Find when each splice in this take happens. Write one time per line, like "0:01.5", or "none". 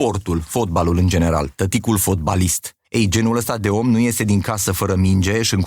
0:02.8